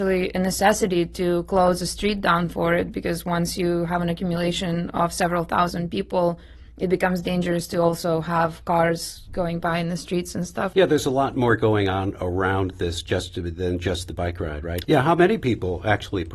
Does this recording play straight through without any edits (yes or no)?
no